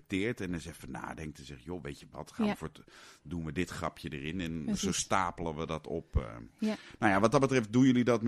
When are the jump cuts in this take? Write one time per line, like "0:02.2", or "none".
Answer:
none